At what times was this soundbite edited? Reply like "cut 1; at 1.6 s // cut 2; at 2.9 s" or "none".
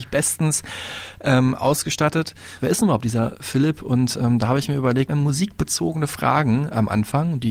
cut 1; at 2.6 s // cut 2; at 5.1 s

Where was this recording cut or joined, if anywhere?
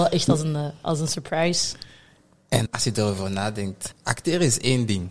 cut 1; at 2.7 s // cut 2; at 3.9 s

